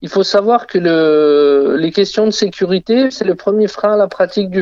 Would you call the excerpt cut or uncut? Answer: uncut